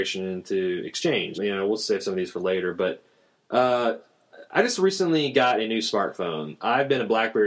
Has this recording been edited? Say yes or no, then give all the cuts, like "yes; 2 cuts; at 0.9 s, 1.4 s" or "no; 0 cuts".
yes; 1 cut; at 1.3 s